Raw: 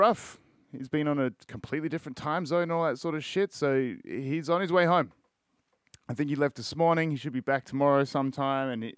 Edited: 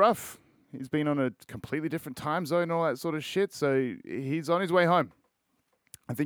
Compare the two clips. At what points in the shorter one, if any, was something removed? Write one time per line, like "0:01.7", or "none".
none